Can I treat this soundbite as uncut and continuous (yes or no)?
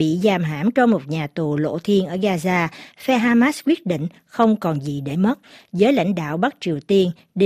yes